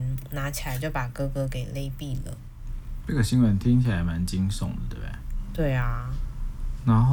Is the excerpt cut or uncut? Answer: uncut